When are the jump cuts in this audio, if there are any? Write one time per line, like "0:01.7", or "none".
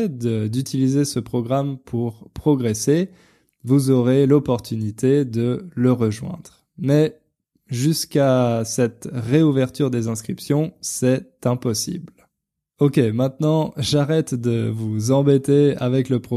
none